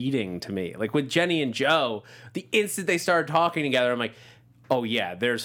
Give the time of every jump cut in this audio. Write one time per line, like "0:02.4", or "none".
none